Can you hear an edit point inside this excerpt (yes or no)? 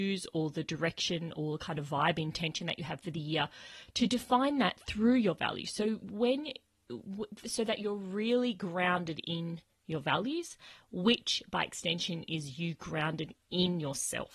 no